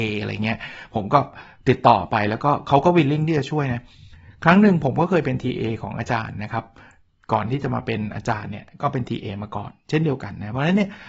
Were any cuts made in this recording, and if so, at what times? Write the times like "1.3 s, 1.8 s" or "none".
none